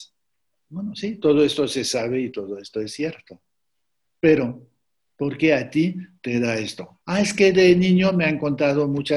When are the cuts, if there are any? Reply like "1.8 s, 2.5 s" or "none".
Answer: 7.0 s